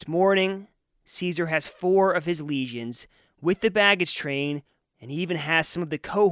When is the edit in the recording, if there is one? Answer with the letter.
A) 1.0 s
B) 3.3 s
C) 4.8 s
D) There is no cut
C